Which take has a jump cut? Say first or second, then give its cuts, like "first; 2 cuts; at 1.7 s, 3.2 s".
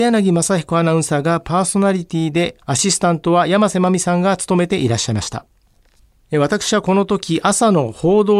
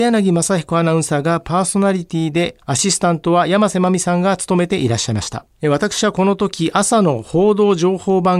second; 1 cut; at 5.5 s